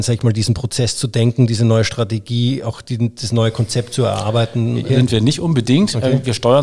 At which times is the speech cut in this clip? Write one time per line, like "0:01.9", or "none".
0:04.9